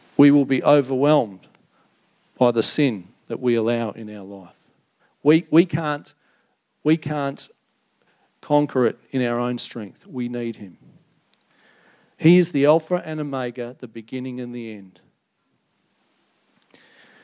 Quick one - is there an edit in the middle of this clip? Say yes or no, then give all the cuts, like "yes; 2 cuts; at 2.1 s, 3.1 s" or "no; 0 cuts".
no; 0 cuts